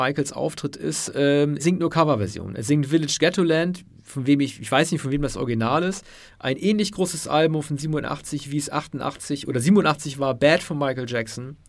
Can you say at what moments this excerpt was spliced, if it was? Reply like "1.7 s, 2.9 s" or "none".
1.6 s, 6.3 s